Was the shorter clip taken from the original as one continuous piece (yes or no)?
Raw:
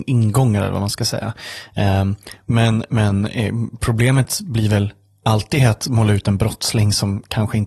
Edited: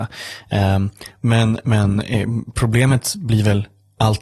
yes